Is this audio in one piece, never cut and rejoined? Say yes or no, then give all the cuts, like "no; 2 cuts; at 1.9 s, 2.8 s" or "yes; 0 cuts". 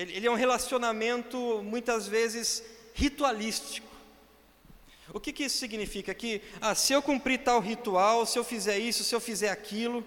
yes; 0 cuts